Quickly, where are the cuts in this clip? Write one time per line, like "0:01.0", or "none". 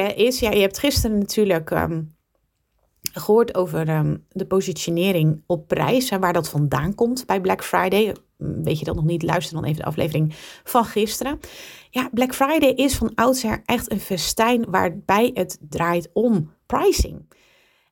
none